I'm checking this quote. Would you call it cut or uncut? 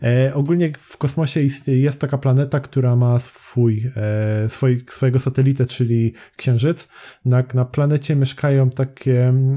cut